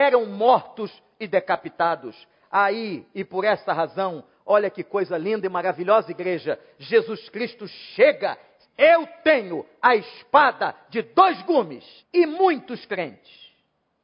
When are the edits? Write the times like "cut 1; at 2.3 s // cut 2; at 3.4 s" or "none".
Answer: cut 1; at 8.6 s // cut 2; at 12.0 s